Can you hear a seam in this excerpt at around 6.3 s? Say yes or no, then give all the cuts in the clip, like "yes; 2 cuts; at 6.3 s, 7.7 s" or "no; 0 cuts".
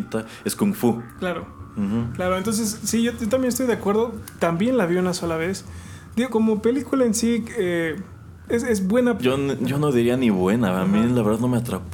yes; 2 cuts; at 6.3 s, 9.2 s